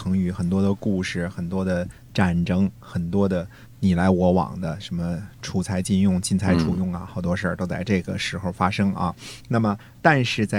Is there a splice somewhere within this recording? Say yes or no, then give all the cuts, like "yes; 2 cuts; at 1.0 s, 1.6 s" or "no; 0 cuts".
no; 0 cuts